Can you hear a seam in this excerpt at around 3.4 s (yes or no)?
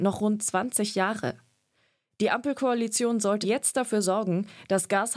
yes